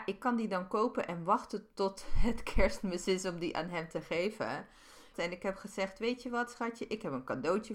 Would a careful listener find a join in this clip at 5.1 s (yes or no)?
yes